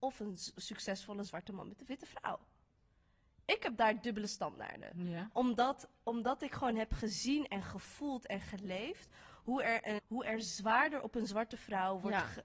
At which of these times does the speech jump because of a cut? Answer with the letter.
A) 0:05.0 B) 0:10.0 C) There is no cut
B